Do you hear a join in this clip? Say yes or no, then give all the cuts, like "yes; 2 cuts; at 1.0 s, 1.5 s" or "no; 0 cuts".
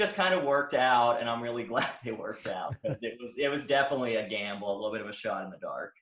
no; 0 cuts